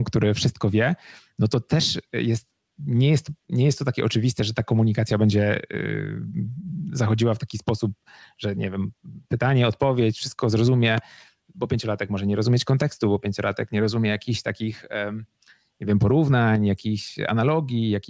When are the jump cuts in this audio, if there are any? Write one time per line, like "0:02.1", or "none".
none